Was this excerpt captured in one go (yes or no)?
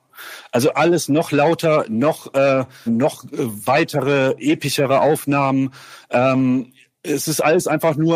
no